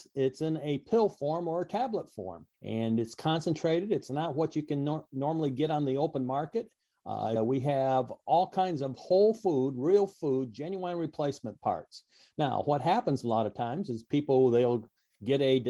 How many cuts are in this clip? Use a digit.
2